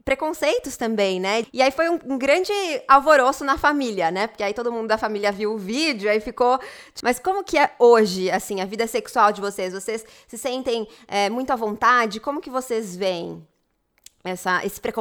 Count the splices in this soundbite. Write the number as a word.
two